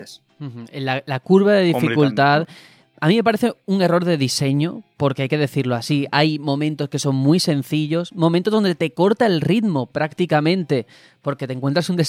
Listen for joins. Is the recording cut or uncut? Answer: uncut